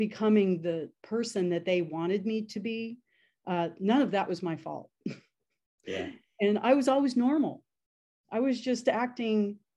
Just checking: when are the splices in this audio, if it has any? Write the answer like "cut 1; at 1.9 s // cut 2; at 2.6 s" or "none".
none